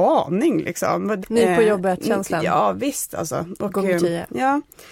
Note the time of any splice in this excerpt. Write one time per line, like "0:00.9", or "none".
0:01.2